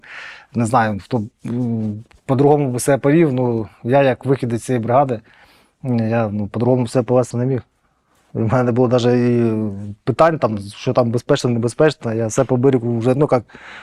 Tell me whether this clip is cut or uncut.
cut